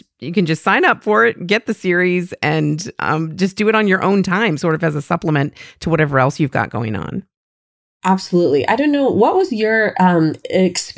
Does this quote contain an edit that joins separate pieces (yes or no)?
no